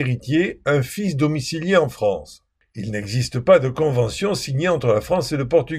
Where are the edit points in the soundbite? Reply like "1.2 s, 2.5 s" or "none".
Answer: none